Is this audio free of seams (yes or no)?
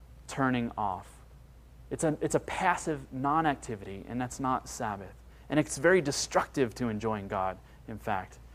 yes